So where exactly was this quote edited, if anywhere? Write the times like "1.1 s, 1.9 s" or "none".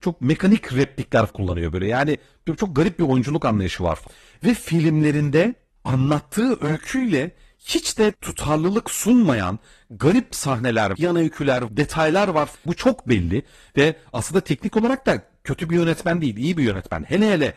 12.7 s